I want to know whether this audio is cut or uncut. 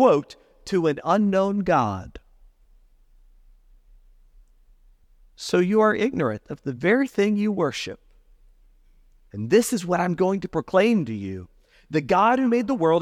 uncut